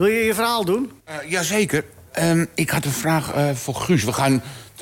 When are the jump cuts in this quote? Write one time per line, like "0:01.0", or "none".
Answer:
0:01.0

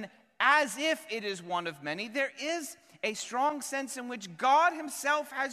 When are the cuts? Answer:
none

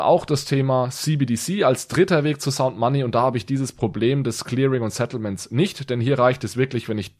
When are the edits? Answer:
none

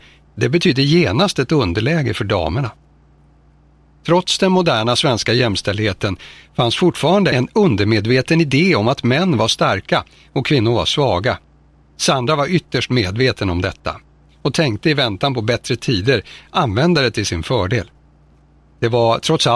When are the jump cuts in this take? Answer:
0:11.8

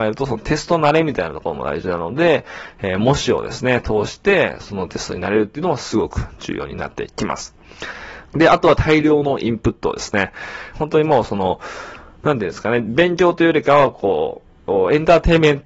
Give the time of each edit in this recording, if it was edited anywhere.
0:08.2
0:10.7

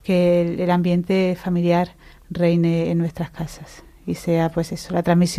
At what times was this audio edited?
none

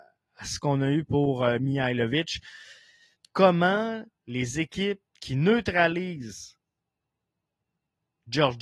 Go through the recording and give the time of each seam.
0:03.2
0:05.1

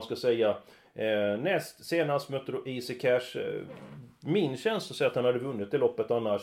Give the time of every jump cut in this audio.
none

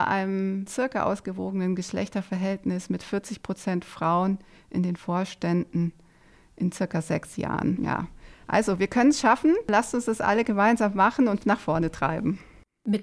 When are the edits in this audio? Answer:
none

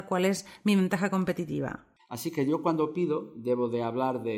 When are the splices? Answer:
0:02.0

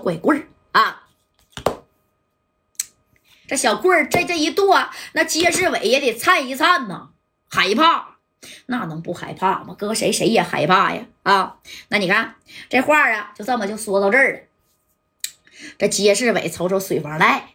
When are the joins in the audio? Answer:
0:03.4

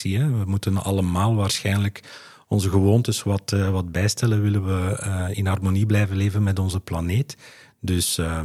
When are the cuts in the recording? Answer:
none

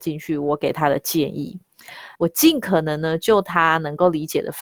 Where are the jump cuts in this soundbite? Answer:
0:02.2

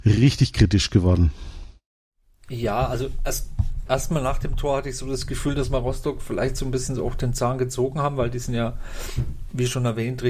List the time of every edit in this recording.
none

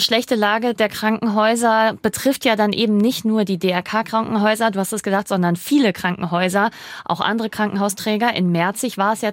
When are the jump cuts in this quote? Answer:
none

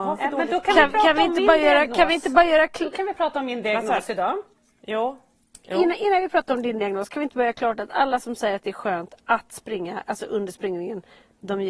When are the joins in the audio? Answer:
none

